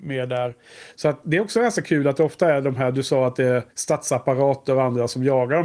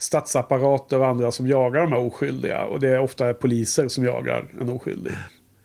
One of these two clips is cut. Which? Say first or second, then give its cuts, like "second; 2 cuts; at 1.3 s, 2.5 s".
first; 2 cuts; at 0.9 s, 3.7 s